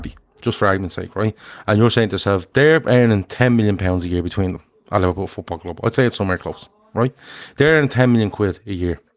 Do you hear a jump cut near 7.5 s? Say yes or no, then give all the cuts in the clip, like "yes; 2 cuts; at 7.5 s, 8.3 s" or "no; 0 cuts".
no; 0 cuts